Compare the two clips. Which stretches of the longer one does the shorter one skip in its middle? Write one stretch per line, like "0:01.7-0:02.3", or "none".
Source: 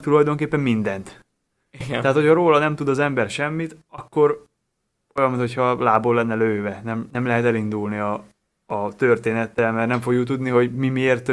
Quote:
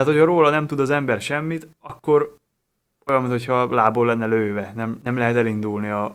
none